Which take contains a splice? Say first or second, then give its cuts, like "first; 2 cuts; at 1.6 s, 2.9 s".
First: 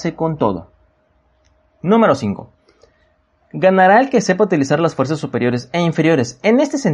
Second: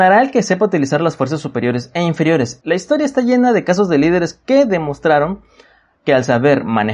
second; 1 cut; at 2.6 s